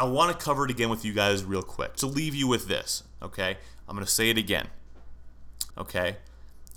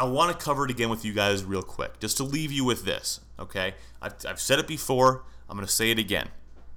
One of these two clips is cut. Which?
first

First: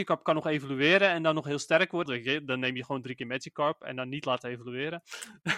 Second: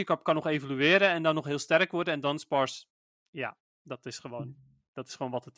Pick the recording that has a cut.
first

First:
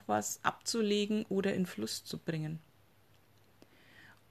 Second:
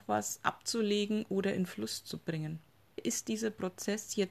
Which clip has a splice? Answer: second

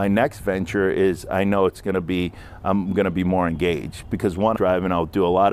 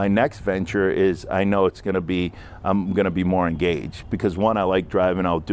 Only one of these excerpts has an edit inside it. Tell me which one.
first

